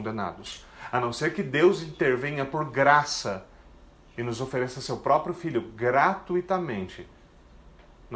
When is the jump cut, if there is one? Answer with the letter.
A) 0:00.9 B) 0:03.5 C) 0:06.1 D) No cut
D